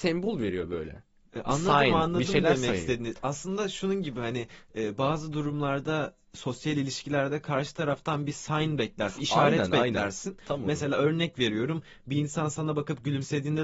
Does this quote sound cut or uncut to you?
uncut